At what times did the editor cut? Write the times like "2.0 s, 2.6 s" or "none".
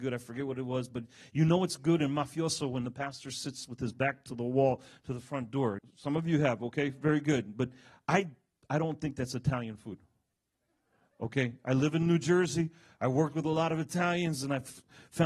5.8 s